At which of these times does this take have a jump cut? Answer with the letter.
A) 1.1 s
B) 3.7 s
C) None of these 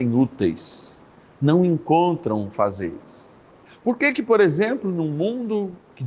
B